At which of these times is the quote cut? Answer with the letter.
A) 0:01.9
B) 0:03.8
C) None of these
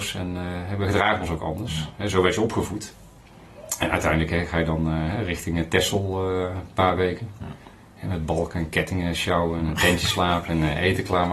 C